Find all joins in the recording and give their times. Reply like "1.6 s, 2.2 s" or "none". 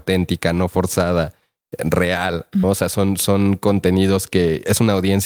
2.6 s